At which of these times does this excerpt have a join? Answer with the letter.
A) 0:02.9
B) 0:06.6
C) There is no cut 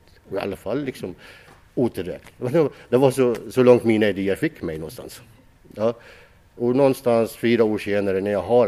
B